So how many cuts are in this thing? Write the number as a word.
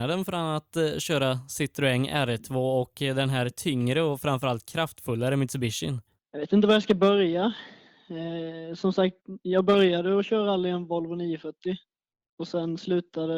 zero